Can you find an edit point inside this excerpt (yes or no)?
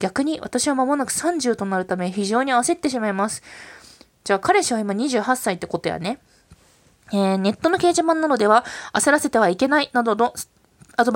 no